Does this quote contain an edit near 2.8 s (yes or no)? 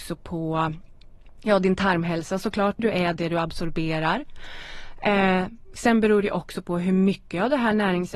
yes